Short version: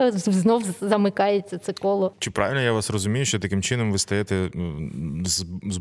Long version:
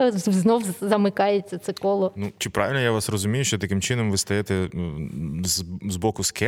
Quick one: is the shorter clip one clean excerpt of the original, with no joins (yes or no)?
no